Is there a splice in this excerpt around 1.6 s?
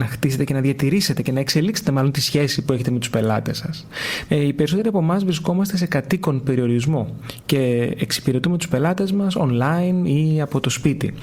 no; 1 cut; at 4.3 s

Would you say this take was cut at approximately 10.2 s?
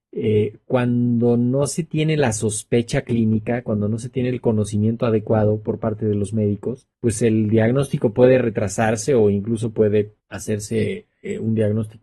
yes; 2 cuts; at 6.9 s, 10.2 s

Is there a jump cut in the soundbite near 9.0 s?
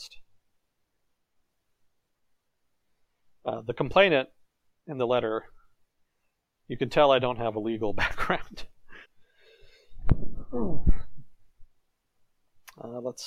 yes; 1 cut; at 9.0 s

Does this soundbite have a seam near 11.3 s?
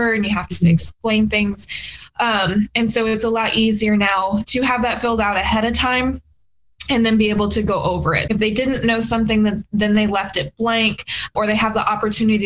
yes; 2 cuts; at 8.3 s, 11.3 s

